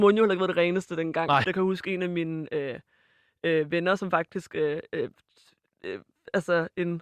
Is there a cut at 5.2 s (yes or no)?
no